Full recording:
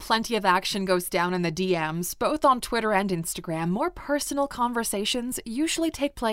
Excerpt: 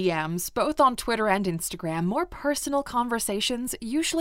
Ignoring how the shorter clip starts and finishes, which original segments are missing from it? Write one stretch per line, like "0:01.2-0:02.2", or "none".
none